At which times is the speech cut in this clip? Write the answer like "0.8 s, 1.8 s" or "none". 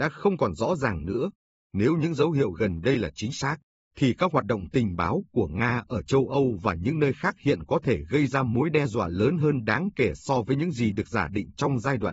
1.5 s